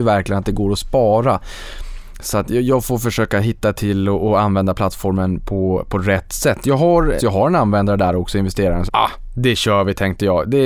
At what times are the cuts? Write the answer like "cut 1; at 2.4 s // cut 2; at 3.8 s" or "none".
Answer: cut 1; at 7.2 s // cut 2; at 8.9 s